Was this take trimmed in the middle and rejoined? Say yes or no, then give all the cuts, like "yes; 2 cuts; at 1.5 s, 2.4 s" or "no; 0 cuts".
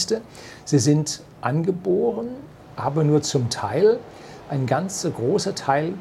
no; 0 cuts